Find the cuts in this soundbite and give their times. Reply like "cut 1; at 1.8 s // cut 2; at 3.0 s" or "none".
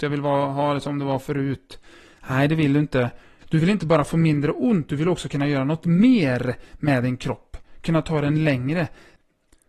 cut 1; at 3.4 s